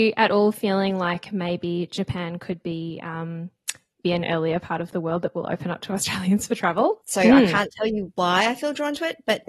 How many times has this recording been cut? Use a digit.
2